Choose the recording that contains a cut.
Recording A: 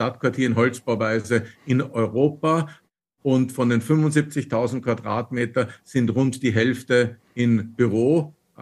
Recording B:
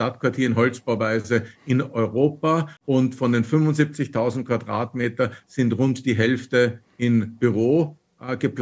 B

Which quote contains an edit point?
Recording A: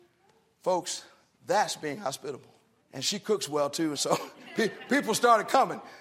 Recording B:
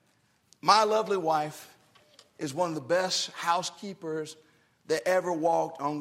A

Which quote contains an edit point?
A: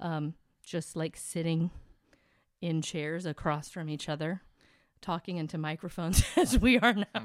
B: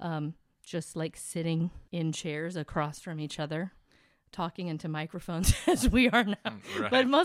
B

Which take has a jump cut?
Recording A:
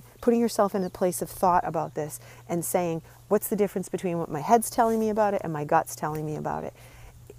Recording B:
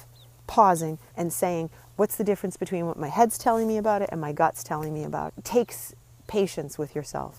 B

